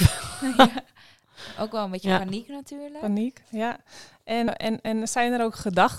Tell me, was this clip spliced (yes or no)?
yes